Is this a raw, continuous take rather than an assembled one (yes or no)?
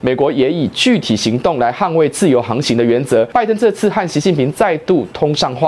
yes